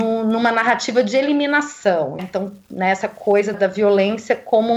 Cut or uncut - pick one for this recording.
cut